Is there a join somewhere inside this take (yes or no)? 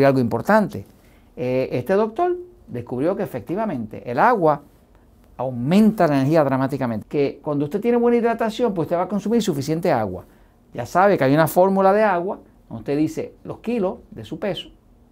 yes